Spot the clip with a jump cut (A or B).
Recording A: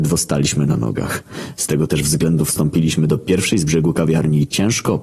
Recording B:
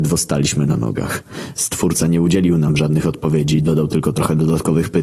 B